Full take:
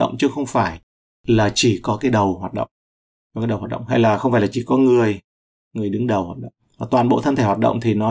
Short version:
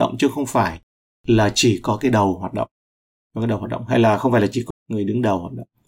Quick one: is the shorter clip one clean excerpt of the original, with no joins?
no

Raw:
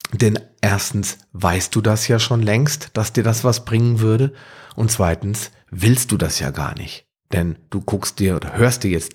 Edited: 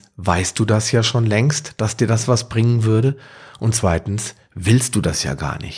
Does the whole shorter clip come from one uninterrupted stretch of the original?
yes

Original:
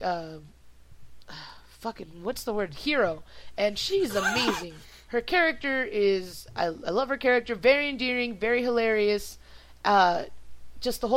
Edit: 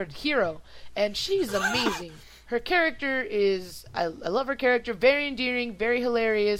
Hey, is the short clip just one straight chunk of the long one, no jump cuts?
yes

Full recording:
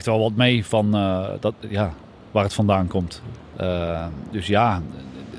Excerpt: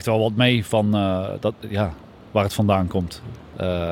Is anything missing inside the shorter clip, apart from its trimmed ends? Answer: no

